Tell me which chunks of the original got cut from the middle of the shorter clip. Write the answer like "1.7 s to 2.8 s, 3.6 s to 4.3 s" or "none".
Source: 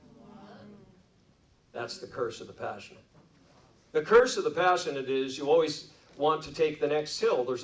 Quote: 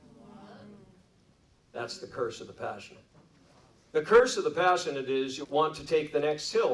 5.4 s to 6.1 s